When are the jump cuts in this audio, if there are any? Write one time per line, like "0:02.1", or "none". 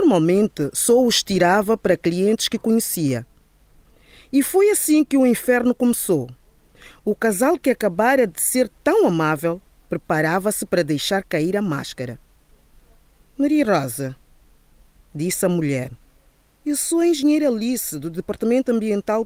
none